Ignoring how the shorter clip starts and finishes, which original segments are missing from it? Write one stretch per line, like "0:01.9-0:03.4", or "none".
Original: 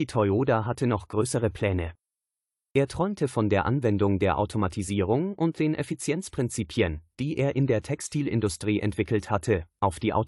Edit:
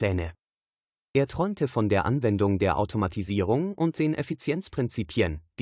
none